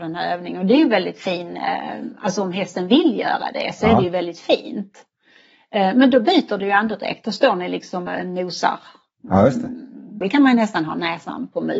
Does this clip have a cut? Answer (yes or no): yes